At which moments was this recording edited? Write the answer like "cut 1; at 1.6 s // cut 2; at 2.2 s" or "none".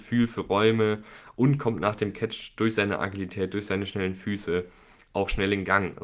none